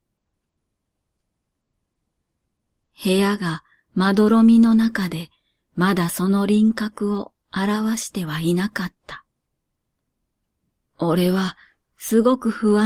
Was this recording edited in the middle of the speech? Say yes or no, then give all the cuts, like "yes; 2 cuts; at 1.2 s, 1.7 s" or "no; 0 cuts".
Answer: yes; 1 cut; at 10.9 s